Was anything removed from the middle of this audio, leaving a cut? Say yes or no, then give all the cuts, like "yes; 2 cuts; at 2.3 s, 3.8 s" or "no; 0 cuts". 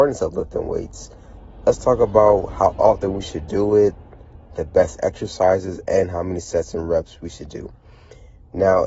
no; 0 cuts